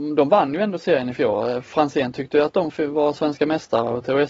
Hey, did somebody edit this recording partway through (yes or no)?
no